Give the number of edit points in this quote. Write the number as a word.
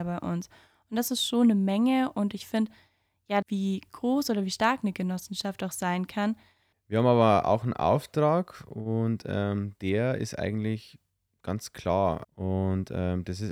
three